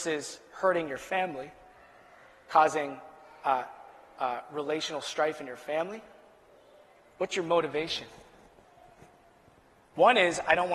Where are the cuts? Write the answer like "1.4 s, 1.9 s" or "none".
none